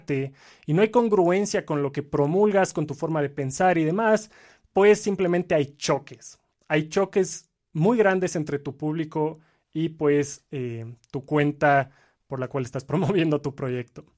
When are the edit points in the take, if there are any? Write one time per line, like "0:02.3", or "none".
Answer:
none